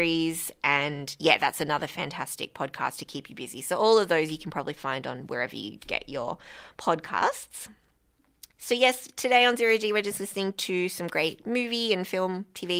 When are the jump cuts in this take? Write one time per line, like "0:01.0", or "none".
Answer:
none